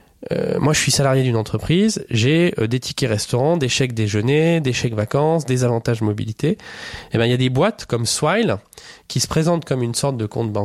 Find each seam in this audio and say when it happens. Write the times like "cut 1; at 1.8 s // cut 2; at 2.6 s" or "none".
none